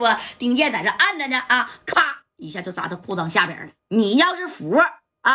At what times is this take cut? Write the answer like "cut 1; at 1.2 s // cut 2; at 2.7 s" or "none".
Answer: cut 1; at 3.8 s